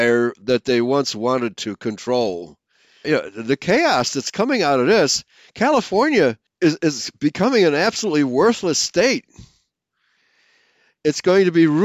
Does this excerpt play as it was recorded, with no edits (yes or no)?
no